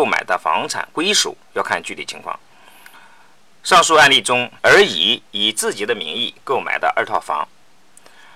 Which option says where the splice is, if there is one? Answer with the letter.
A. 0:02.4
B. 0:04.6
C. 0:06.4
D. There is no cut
B